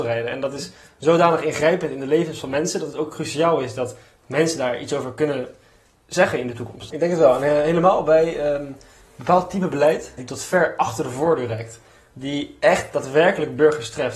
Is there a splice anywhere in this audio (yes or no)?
yes